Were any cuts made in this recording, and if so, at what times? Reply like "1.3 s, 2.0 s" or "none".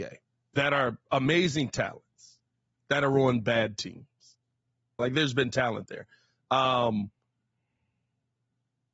5.0 s